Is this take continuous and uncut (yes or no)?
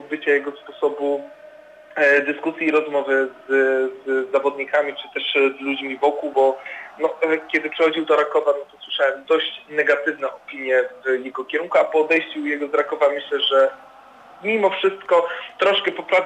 yes